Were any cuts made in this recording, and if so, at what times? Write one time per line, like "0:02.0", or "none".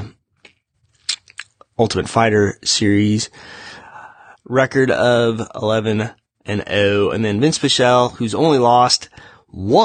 0:04.3

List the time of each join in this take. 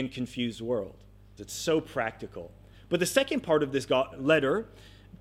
0:01.4
0:02.7
0:04.1

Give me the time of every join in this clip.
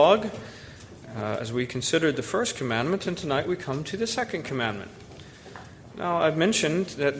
none

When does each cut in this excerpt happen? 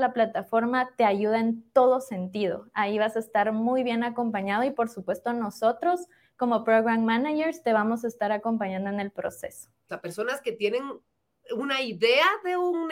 0:09.9

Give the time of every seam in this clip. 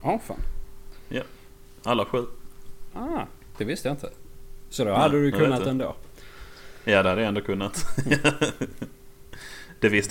none

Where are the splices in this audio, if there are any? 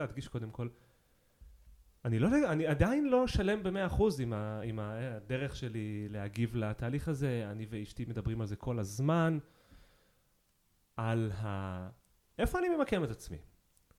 none

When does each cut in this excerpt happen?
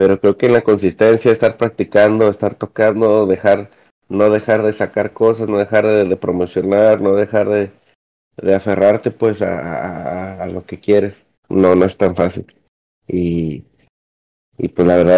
0:11.4

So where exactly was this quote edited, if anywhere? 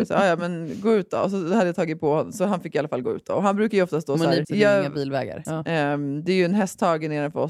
0:04.4
0:05.4

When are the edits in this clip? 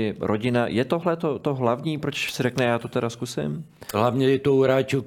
0:03.9

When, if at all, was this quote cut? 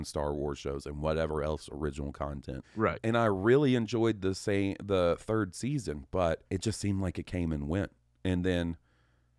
0:02.6
0:06.5

